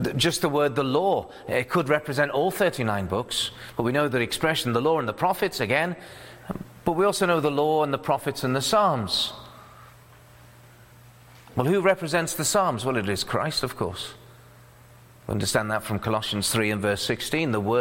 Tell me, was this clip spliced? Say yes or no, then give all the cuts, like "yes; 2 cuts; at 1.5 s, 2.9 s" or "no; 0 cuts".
no; 0 cuts